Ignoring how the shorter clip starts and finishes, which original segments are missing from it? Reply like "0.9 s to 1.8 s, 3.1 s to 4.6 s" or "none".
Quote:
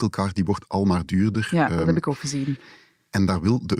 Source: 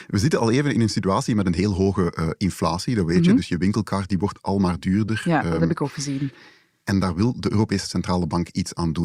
none

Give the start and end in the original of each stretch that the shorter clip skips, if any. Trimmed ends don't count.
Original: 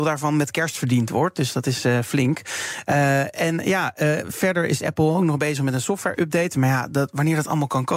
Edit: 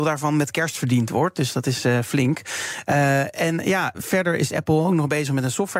3.9 s to 4.2 s

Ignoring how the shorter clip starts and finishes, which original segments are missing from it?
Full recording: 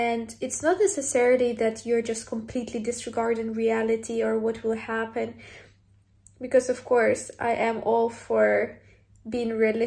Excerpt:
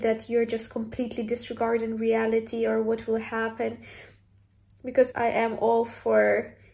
6.7 s to 7.3 s

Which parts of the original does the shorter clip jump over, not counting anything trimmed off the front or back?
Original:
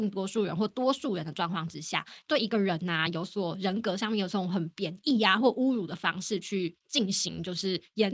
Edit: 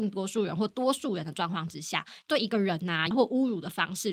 3.1 s to 5.4 s

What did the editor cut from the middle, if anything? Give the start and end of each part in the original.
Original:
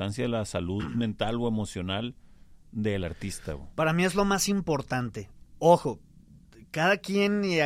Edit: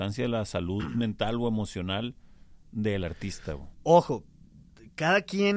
3.7 s to 5.5 s

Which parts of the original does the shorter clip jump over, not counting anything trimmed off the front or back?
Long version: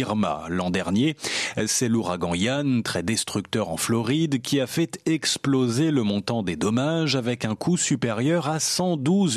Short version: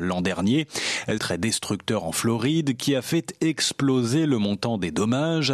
1.7 s to 2.8 s

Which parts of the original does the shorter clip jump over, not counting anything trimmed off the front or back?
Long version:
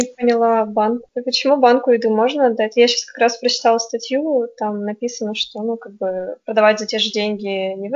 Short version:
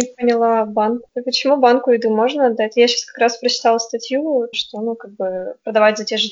4.5 s to 5.3 s

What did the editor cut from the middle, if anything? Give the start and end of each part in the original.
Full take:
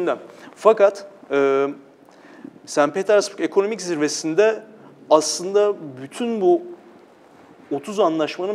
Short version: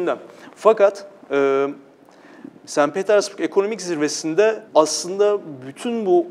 4.7 s to 5.0 s

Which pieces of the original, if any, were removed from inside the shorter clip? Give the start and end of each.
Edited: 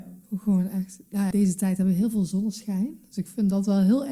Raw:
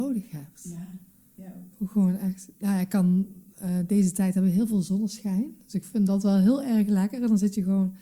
2.8 s to 3.9 s

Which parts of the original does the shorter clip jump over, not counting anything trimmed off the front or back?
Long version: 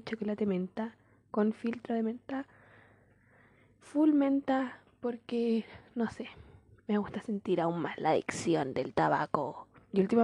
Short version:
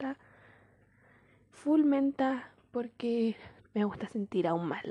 5.9 s to 6.7 s

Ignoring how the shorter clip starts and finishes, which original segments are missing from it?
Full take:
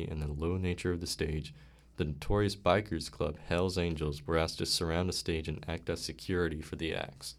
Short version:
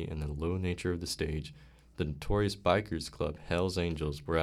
none

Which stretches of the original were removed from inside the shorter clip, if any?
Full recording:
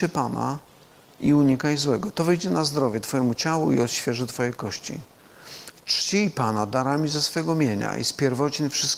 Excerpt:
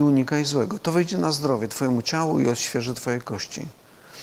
none

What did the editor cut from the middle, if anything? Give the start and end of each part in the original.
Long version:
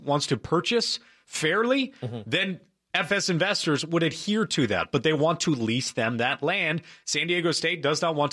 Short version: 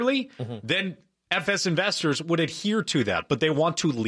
none

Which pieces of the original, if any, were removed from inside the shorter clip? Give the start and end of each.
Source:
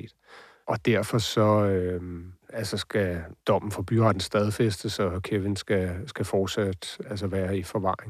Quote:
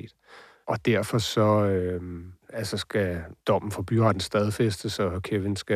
none

